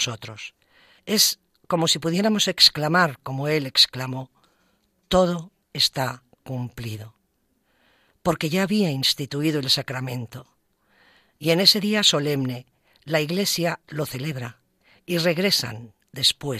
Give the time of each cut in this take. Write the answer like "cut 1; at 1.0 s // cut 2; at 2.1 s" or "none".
cut 1; at 1.0 s